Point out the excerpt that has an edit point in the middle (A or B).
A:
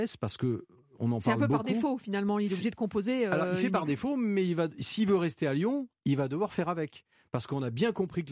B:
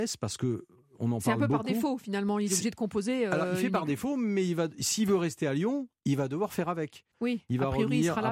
B